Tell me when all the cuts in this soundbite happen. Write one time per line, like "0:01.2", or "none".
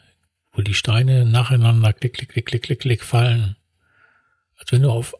none